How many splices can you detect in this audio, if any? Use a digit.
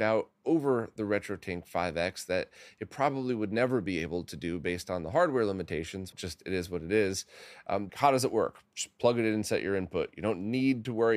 2